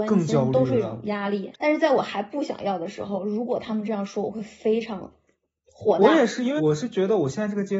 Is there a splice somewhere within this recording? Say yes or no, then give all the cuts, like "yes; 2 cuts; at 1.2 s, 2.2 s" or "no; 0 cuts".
yes; 2 cuts; at 1.5 s, 6.6 s